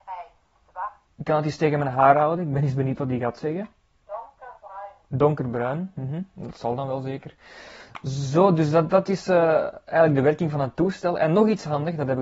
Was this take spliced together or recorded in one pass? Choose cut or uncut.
cut